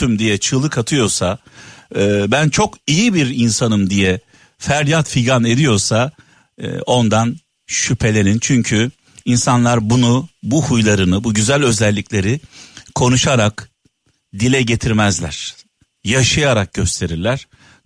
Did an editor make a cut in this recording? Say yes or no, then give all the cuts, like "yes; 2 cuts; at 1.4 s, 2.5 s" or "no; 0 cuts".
no; 0 cuts